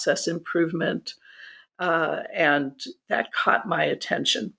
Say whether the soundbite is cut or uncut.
uncut